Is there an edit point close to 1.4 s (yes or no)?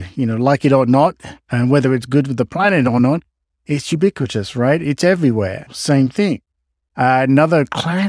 no